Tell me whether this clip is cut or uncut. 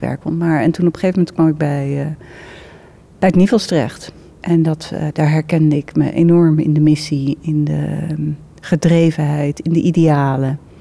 uncut